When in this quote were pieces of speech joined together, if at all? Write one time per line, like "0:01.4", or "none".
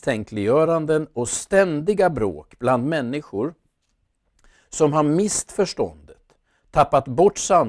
none